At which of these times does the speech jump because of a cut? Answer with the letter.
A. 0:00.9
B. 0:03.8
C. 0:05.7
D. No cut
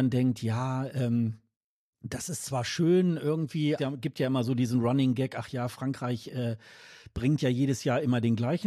B